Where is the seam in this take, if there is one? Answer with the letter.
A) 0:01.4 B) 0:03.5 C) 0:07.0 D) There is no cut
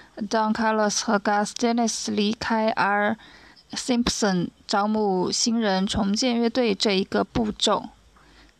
B